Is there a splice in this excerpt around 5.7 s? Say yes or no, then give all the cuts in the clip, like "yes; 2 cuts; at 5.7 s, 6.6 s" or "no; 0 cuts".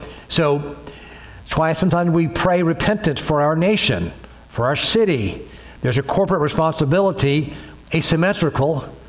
no; 1 cut; at 7.8 s